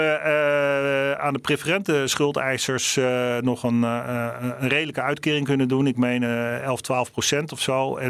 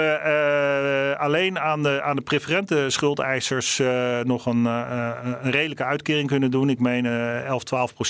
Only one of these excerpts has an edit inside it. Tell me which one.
first; 1 cut; at 1.2 s

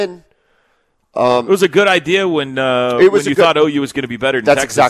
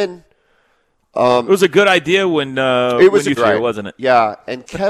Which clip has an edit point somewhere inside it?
second; 1 cut; at 3.4 s

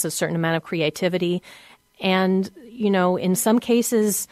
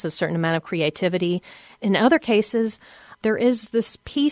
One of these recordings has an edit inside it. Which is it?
second; 1 cut; at 1.8 s

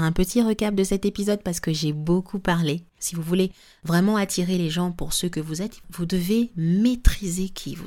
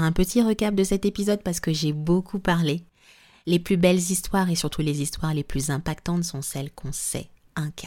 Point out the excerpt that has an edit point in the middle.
first; 2 cuts; at 3.0 s, 5.8 s

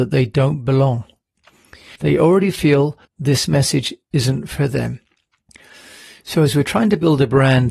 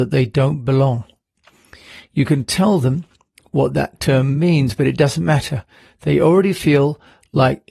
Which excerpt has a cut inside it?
first; 2 cuts; at 2.0 s, 3.1 s

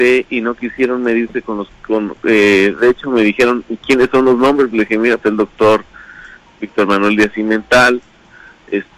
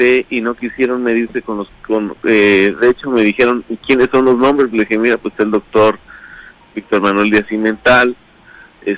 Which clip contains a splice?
first; 1 cut; at 5.2 s

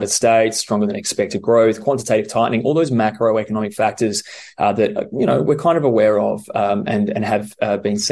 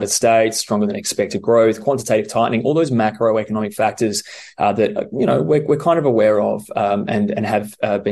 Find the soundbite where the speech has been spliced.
first; 1 cut; at 5.4 s

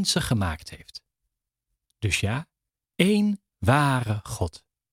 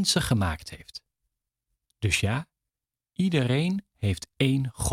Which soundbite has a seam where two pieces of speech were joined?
first; 1 cut; at 2.9 s

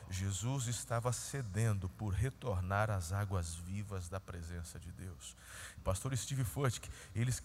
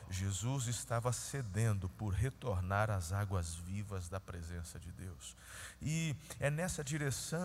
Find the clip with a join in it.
first; 1 cut; at 5.8 s

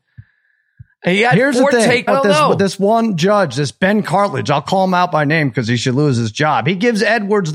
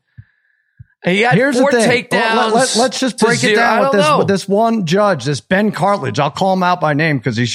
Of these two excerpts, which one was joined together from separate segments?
first; 1 cut; at 2.1 s

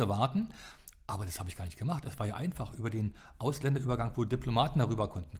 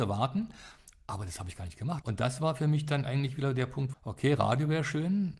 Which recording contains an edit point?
second; 2 cuts; at 2.0 s, 3.9 s

